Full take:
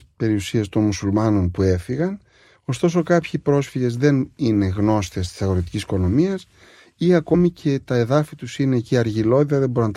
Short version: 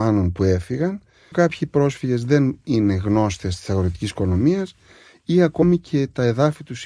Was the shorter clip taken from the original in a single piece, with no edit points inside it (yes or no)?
no